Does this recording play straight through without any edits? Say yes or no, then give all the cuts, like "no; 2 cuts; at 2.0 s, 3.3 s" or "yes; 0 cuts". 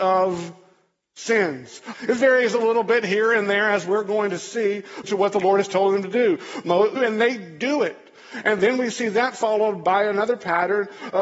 no; 3 cuts; at 1.9 s, 5.0 s, 7.0 s